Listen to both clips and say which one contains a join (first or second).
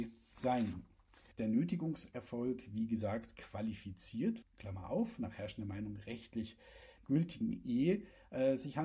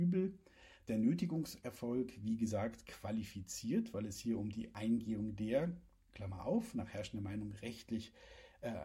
first